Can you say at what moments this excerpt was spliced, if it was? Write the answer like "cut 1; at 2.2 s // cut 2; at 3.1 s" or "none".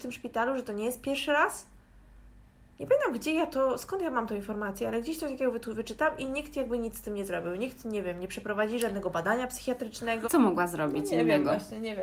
cut 1; at 10.2 s